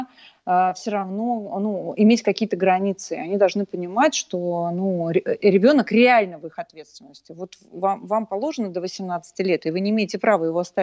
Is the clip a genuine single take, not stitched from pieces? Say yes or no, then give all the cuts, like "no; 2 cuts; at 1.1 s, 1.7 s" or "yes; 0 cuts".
yes; 0 cuts